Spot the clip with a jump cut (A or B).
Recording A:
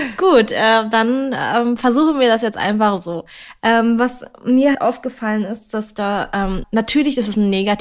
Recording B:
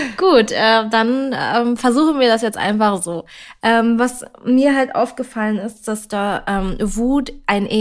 A